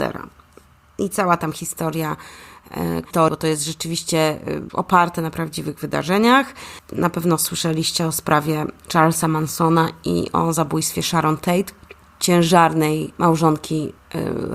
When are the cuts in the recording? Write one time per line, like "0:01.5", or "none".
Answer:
0:03.0